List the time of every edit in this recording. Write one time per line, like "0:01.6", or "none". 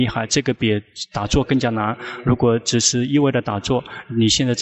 none